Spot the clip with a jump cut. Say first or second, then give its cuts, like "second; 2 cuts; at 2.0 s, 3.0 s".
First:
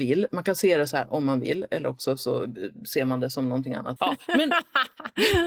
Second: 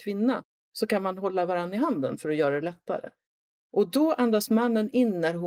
first; 1 cut; at 4.0 s